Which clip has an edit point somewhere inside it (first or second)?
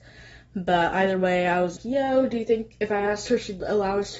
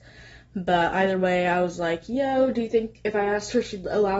first